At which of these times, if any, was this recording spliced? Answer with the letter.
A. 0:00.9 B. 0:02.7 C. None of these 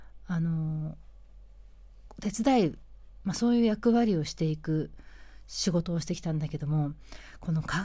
C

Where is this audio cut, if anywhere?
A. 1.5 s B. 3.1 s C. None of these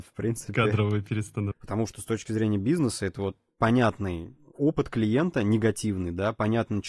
A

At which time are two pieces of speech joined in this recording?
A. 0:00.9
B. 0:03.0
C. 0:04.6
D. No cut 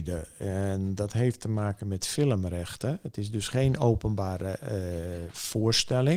D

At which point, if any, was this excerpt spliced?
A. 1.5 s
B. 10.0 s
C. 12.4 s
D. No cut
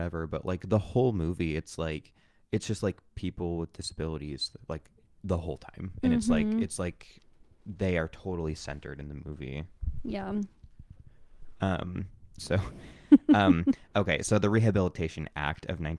C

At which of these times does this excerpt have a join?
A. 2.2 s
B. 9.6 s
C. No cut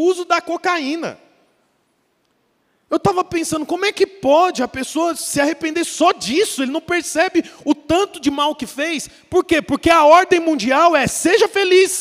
C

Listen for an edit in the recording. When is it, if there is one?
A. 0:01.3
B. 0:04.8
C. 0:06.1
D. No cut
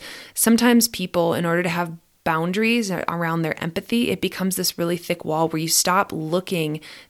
D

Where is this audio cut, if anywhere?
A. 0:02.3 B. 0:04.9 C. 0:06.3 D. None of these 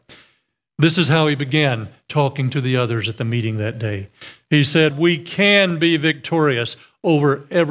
B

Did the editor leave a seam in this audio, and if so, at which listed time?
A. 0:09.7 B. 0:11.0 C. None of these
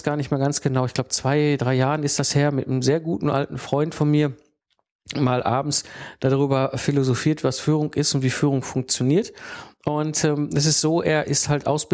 C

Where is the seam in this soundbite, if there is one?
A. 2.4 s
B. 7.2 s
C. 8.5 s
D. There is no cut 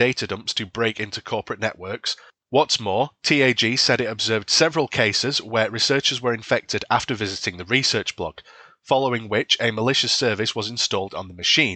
A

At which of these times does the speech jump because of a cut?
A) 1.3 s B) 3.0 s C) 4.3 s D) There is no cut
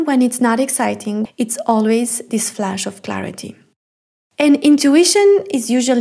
A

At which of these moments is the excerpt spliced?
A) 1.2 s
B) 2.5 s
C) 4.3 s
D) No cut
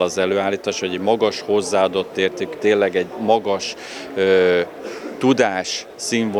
B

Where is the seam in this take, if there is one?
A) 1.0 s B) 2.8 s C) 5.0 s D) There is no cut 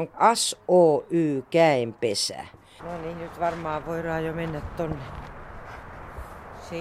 B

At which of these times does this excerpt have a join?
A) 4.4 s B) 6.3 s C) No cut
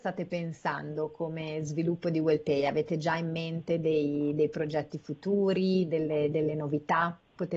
B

